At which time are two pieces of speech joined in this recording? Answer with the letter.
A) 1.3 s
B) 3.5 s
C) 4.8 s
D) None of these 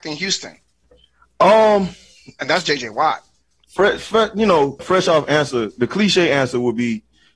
C